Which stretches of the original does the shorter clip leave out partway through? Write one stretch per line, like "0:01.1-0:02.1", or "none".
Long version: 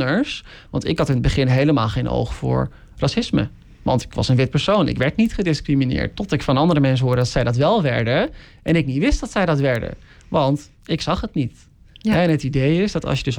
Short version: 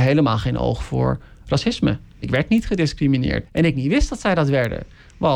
0:03.7-0:04.9
0:06.1-0:08.6